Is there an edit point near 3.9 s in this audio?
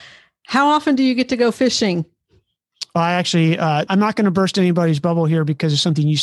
yes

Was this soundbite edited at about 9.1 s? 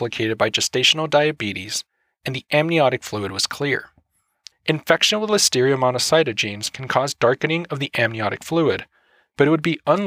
no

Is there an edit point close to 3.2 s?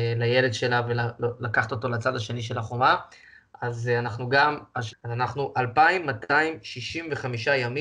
no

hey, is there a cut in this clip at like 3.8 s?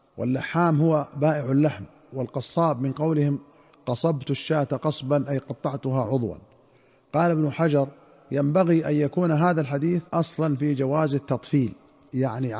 no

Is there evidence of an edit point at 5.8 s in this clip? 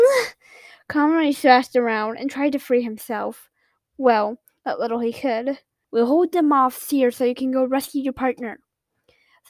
yes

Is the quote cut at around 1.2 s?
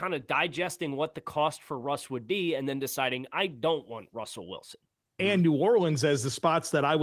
no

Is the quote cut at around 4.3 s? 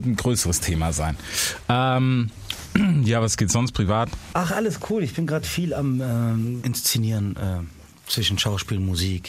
yes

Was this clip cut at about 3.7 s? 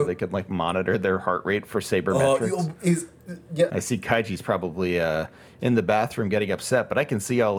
yes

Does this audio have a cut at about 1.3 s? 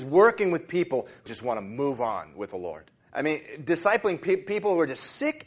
yes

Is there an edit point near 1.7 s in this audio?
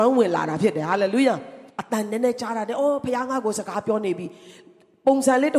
yes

